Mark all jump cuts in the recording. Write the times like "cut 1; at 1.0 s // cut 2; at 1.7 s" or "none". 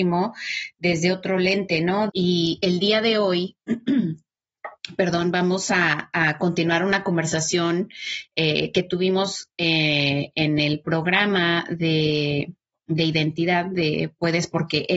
cut 1; at 2.1 s

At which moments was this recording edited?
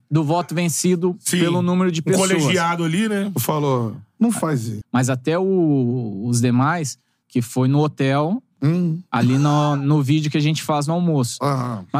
cut 1; at 4.8 s // cut 2; at 7.2 s

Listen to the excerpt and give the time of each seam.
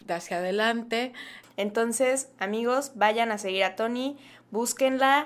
cut 1; at 1.4 s

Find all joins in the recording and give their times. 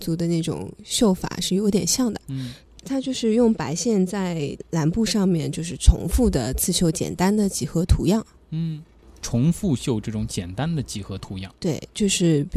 none

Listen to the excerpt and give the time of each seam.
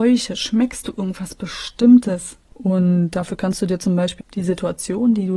cut 1; at 2.5 s // cut 2; at 4.2 s

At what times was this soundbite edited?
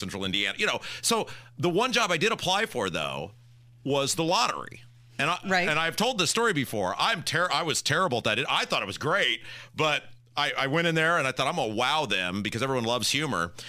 none

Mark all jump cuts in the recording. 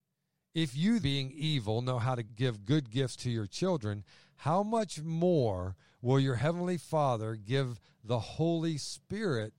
cut 1; at 1.0 s // cut 2; at 2.3 s

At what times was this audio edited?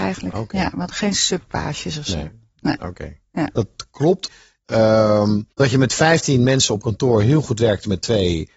none

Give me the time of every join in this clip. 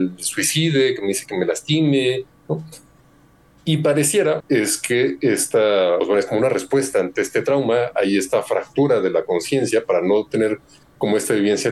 cut 1; at 4.4 s // cut 2; at 6.0 s

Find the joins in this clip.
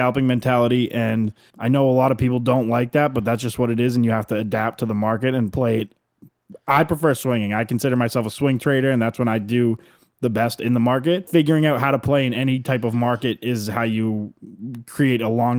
none

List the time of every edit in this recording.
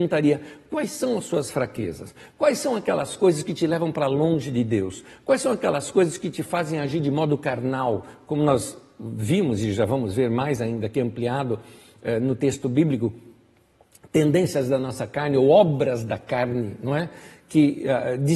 none

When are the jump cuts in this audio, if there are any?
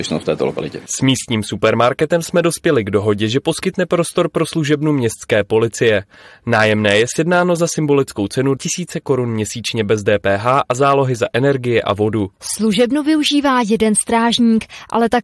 cut 1; at 8.6 s // cut 2; at 12.3 s

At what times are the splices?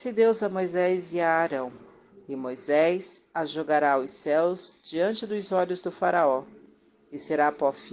cut 1; at 2.1 s

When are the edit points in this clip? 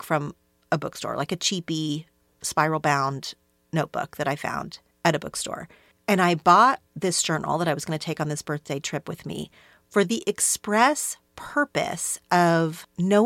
none

